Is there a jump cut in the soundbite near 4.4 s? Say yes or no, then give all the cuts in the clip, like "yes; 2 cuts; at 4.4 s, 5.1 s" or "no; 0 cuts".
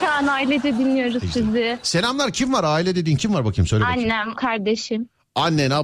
yes; 1 cut; at 4.4 s